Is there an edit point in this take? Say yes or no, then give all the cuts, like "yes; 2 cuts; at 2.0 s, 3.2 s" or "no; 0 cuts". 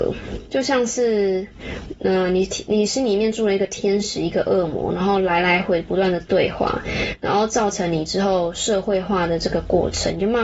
yes; 1 cut; at 5.6 s